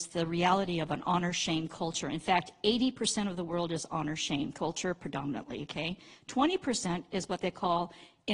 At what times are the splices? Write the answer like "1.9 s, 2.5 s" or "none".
2.0 s